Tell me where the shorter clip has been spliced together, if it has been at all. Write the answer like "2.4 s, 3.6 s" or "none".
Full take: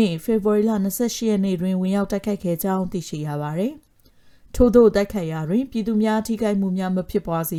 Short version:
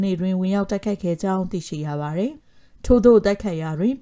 2.4 s